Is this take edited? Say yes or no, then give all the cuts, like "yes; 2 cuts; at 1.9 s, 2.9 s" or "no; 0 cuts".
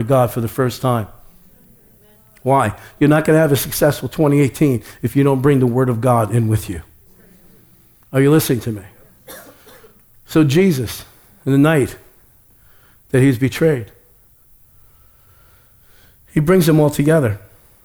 no; 0 cuts